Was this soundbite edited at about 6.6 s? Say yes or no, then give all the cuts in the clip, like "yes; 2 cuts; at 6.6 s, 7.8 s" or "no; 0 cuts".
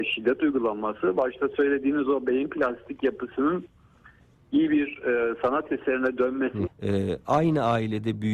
yes; 1 cut; at 6.6 s